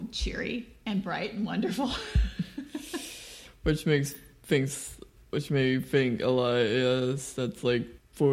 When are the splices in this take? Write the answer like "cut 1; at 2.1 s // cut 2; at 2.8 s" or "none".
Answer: none

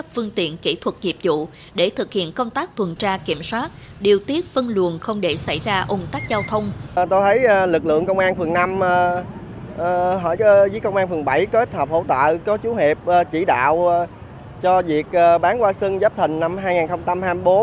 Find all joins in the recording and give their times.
cut 1; at 3.9 s // cut 2; at 6.9 s // cut 3; at 10.4 s

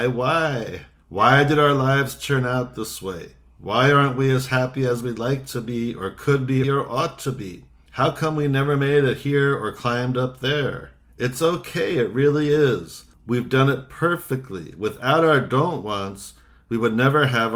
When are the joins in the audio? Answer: cut 1; at 6.6 s

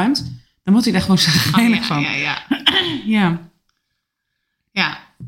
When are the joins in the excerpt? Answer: none

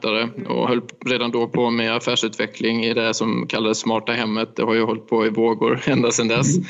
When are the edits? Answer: none

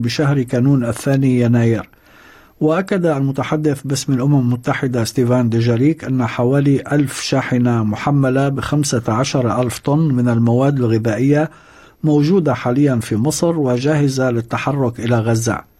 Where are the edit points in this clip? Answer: none

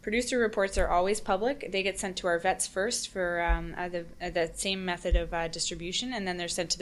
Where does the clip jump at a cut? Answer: none

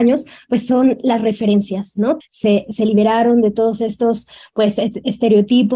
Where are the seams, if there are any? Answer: cut 1; at 2.2 s

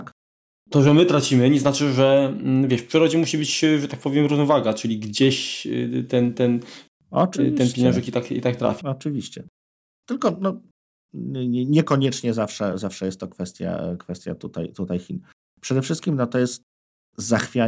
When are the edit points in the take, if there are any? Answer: cut 1; at 8.8 s

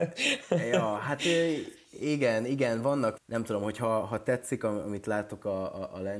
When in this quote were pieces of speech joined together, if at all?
cut 1; at 3.2 s

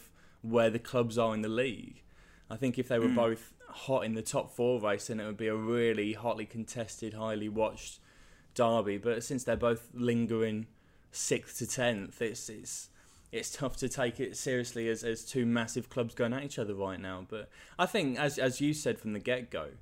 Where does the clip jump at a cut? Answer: none

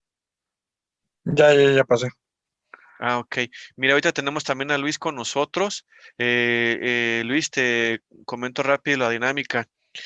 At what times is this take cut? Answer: none

